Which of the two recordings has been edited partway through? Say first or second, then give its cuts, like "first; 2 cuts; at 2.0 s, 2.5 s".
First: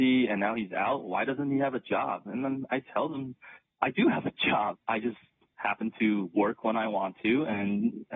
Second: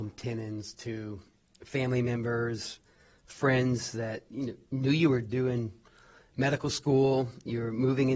first; 1 cut; at 4.7 s